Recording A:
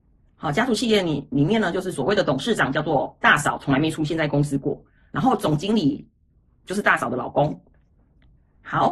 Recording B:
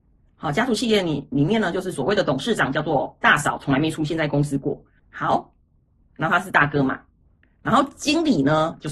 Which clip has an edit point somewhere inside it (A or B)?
B